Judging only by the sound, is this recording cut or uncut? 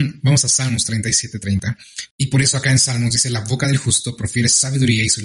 cut